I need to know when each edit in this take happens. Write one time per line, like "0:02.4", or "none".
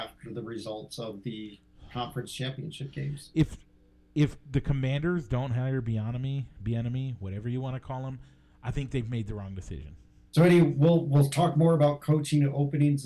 0:10.3